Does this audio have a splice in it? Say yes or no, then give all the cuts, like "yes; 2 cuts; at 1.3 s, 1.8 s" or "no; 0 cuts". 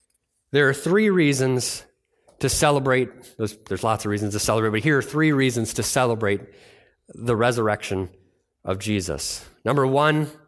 no; 0 cuts